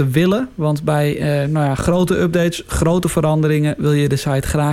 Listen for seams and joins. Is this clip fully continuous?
yes; 0 cuts

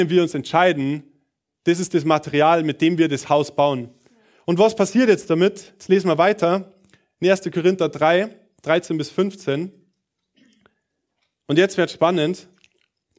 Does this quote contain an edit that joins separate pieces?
no; 0 cuts

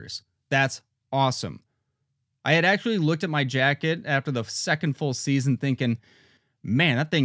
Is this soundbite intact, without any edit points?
yes; 0 cuts

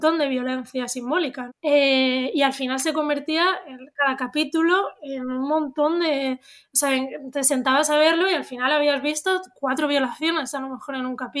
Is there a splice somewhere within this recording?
yes; 1 cut; at 1.5 s

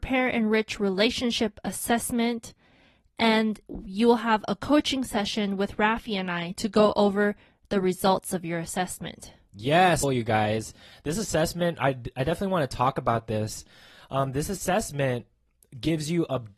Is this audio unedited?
no; 1 cut; at 10.0 s

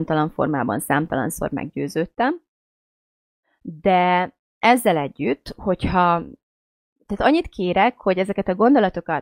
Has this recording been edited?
no; 0 cuts

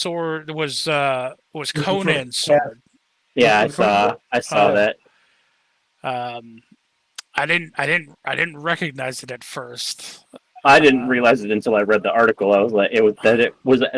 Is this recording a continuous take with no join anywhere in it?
yes; 0 cuts

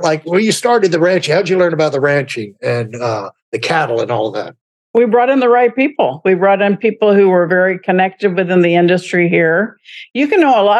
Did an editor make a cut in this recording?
no; 0 cuts

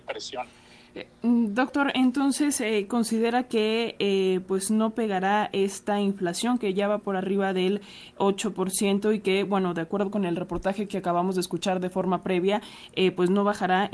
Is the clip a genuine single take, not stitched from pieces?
yes; 0 cuts

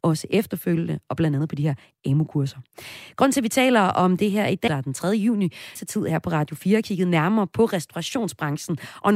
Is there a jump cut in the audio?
yes; 2 cuts; at 4.7 s, 5.8 s

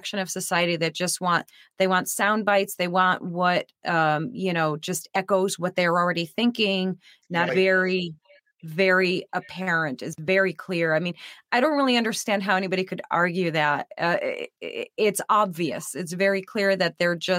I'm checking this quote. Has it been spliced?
yes; 1 cut; at 7.5 s

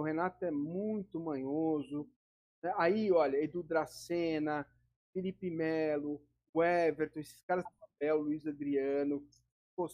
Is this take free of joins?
no; 1 cut; at 7.7 s

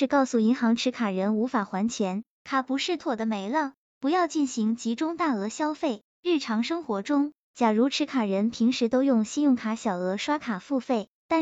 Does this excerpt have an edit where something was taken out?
yes; 1 cut; at 3.0 s

